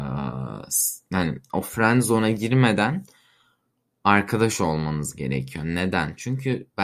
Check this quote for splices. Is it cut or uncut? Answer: uncut